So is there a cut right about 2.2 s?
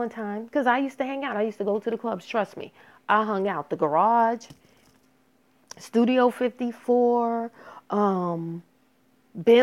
no; 0 cuts

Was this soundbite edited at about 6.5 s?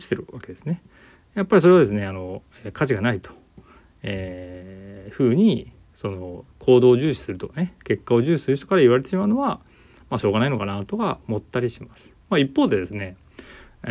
yes; 1 cut; at 6.5 s

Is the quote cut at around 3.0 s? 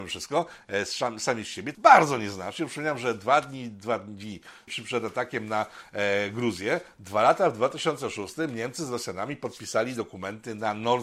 no; 2 cuts; at 1.7 s, 4.7 s

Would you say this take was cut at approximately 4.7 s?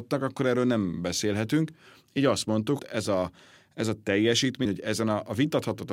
yes; 2 cuts; at 2.8 s, 4.7 s

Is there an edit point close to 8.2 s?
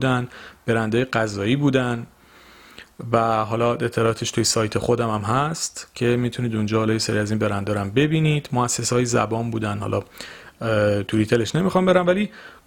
no; 0 cuts

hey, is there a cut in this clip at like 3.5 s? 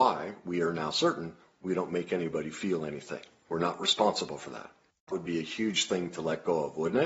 yes; 2 cuts; at 3.5 s, 4.9 s

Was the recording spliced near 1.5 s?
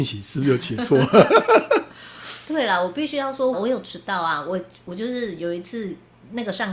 no; 1 cut; at 3.5 s

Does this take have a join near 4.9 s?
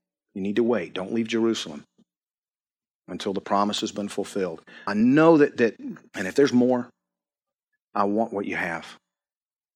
yes; 1 cut; at 4.9 s

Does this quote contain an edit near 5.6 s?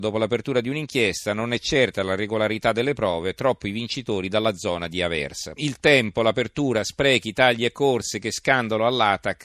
yes; 1 cut; at 5.6 s

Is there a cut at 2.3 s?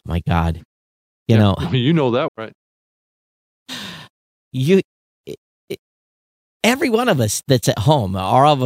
yes; 1 cut; at 2.3 s

